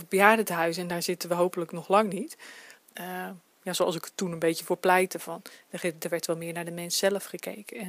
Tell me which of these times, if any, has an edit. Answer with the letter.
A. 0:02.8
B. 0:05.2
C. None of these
A